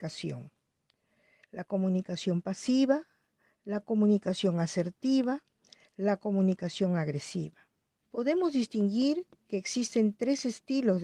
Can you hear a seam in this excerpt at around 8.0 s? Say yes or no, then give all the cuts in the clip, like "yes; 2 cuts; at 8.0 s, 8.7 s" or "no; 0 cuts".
yes; 1 cut; at 8.0 s